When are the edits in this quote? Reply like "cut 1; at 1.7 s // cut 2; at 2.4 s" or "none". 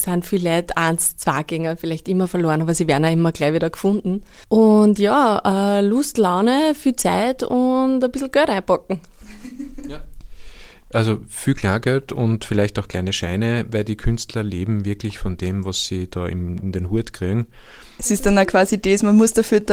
cut 1; at 4.4 s